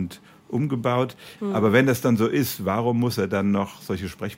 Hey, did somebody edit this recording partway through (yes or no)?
yes